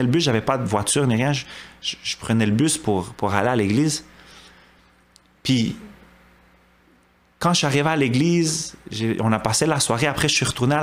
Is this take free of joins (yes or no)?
yes